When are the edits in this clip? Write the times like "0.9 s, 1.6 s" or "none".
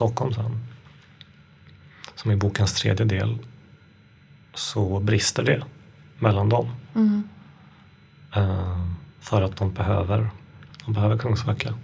10.7 s